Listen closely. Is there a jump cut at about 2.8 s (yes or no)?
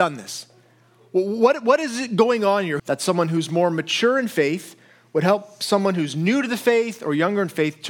yes